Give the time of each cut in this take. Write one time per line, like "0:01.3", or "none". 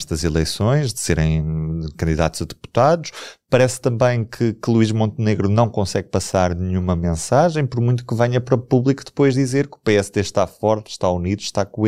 none